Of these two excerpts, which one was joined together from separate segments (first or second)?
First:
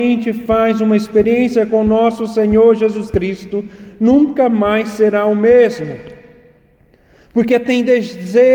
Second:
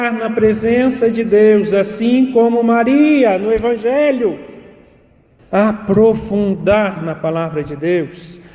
second